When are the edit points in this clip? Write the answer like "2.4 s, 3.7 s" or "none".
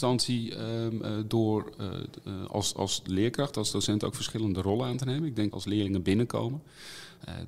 5.5 s